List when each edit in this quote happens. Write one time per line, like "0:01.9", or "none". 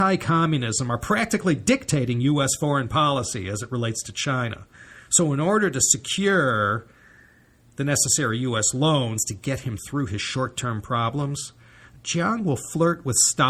none